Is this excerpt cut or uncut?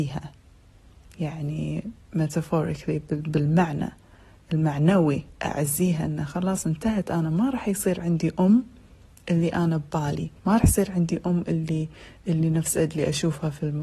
cut